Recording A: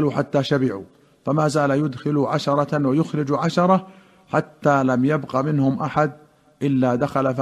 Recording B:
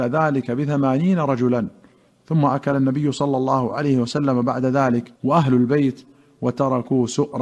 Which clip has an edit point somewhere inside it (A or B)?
B